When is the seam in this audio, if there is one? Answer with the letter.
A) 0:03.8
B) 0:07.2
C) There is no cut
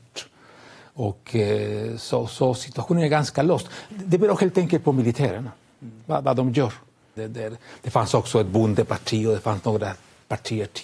B